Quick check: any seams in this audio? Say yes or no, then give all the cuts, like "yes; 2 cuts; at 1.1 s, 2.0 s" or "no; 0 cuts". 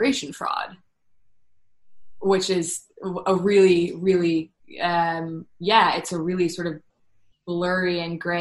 no; 0 cuts